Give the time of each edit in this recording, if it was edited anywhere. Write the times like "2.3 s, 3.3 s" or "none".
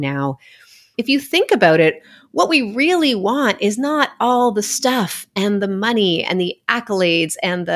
0.9 s